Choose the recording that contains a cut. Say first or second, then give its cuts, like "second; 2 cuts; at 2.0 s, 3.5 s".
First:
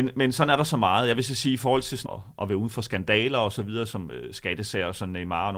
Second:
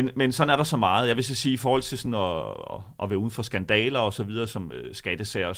first; 1 cut; at 2.1 s